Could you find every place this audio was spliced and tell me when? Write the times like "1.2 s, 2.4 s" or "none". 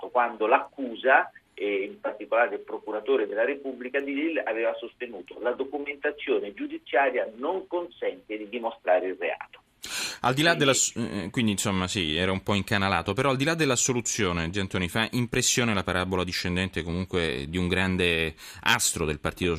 none